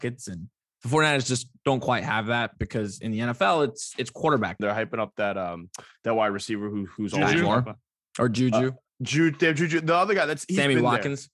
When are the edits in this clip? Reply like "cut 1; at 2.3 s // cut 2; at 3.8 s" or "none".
cut 1; at 4.6 s